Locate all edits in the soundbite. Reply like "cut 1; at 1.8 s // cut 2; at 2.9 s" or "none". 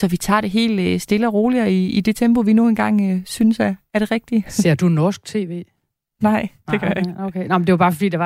none